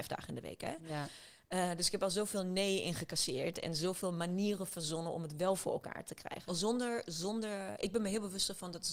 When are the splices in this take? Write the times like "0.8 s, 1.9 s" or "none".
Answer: 6.5 s